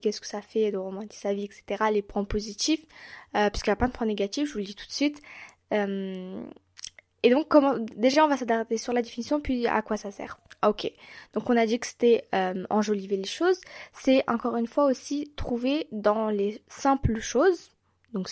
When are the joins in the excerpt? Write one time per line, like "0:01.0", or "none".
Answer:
none